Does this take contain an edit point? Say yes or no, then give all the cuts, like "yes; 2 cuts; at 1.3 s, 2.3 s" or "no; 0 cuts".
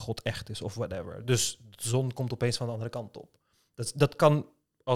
no; 0 cuts